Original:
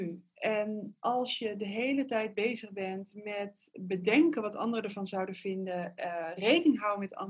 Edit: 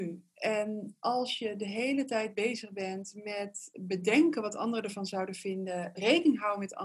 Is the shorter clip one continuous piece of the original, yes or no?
no